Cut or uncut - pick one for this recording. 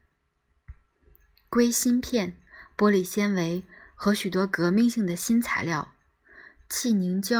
uncut